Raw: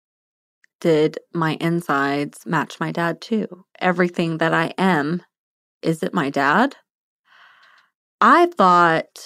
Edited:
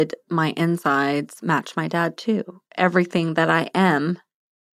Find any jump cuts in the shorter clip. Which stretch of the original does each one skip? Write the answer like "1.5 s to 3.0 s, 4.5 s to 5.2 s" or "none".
none